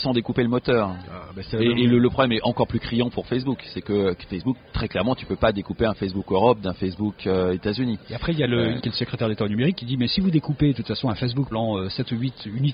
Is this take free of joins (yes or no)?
no